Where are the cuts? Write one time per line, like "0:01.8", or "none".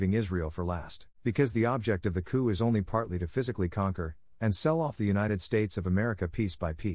0:01.1
0:04.3